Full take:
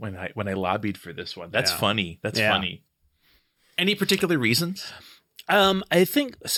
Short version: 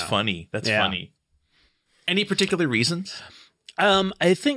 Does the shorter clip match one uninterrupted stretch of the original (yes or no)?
yes